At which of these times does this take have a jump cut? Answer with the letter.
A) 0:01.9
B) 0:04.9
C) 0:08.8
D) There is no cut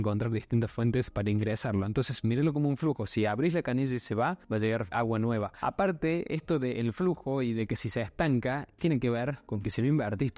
B